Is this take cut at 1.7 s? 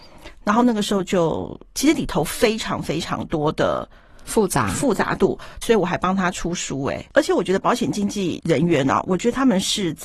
yes; 2 cuts; at 1.7 s, 5.6 s

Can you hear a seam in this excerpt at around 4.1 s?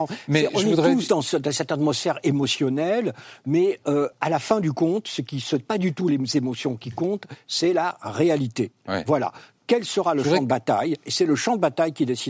no; 0 cuts

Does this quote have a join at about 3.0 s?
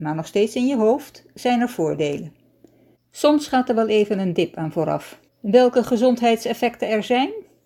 yes; 2 cuts; at 3.0 s, 5.3 s

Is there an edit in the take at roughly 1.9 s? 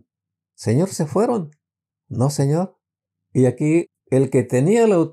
yes; 1 cut; at 1.9 s

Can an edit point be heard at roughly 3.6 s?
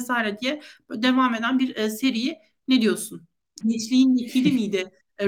yes; 1 cut; at 3.6 s

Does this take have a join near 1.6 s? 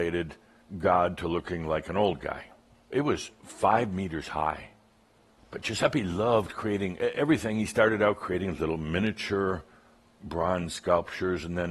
no; 2 cuts; at 2.9 s, 5.4 s

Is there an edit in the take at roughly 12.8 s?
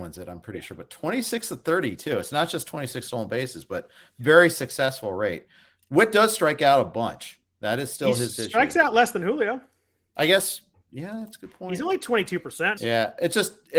yes; 1 cut; at 12.8 s

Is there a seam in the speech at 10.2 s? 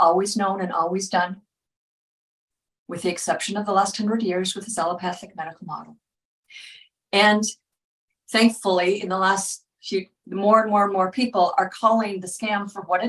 yes; 1 cut; at 10.2 s

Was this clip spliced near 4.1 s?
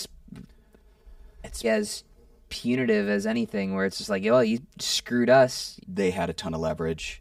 no; 2 cuts; at 1.6 s, 5.8 s

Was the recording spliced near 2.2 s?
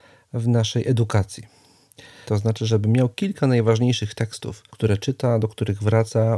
yes; 2 cuts; at 2.2 s, 4.7 s

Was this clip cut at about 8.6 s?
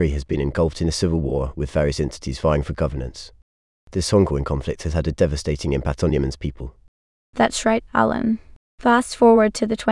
yes; 1 cut; at 8.6 s

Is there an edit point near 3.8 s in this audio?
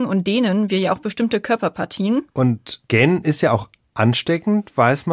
no; 1 cut; at 2.3 s

